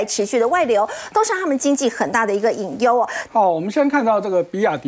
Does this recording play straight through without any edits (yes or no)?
no